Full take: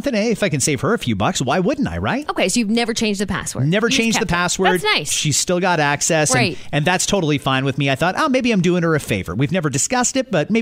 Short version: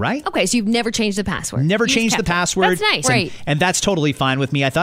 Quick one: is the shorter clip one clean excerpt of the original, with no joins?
no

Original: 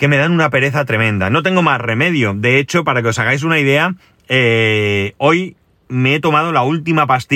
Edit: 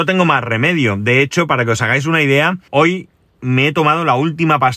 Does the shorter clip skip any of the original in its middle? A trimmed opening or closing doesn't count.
yes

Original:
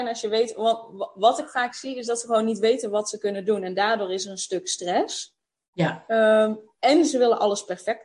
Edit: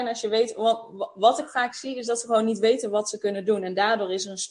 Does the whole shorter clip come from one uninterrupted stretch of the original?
yes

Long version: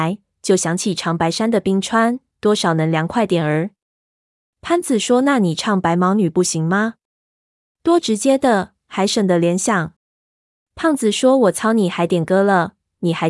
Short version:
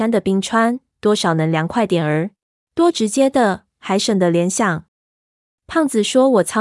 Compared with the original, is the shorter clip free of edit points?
no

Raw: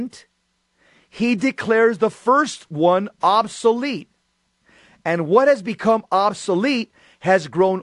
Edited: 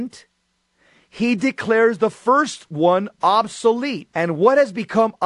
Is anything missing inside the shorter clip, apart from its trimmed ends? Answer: yes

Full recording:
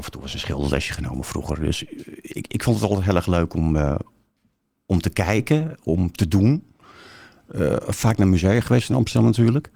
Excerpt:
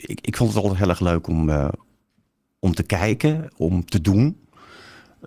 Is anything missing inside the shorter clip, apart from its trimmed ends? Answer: no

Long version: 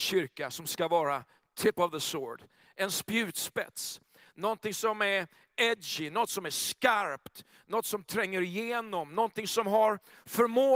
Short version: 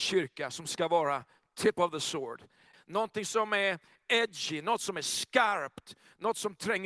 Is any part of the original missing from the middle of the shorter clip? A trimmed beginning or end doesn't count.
yes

